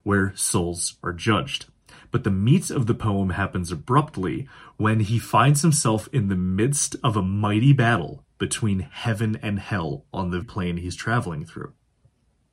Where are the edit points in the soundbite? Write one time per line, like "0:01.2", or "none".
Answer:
0:10.4

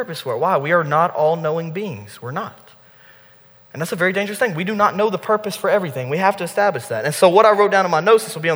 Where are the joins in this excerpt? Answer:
none

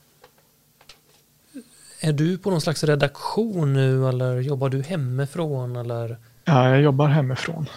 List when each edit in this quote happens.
none

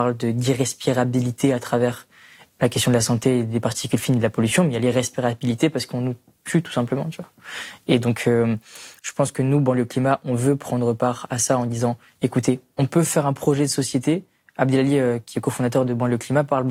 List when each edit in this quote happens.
0:09.0

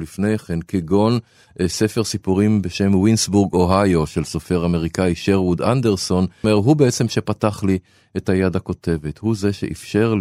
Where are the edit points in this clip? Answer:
0:06.4

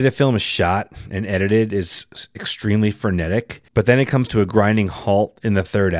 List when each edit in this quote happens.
0:03.7

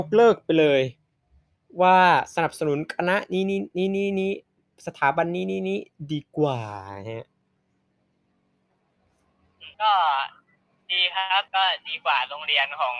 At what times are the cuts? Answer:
0:09.7
0:11.5

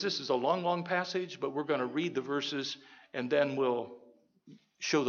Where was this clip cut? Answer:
none

